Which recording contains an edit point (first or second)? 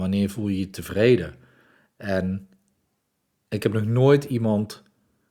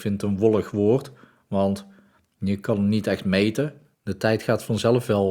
second